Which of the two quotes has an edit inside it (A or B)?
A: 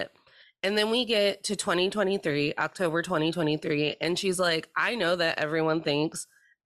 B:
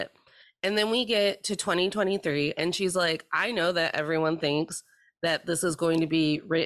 B